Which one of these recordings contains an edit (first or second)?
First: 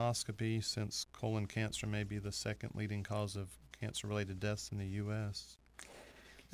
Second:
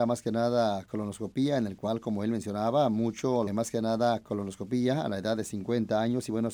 second